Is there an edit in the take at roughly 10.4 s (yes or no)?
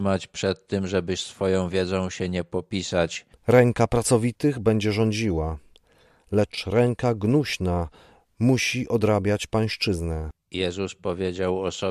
yes